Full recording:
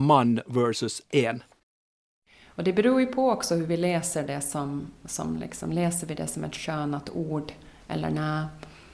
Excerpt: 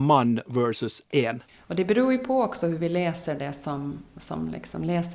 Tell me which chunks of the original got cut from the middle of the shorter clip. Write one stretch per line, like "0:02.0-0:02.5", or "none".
0:01.5-0:02.4